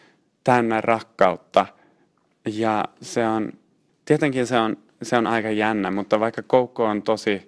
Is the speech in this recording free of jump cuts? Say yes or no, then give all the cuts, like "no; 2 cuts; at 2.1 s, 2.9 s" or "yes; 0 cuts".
yes; 0 cuts